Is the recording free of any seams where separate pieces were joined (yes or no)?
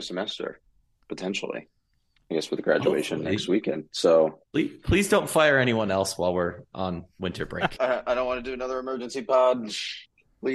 no